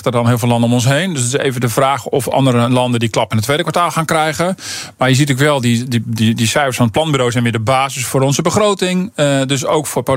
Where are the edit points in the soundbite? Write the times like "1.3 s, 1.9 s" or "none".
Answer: none